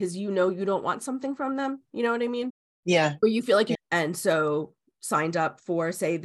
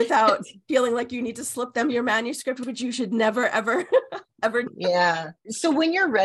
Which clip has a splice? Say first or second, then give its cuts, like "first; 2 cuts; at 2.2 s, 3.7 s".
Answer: first; 1 cut; at 3.8 s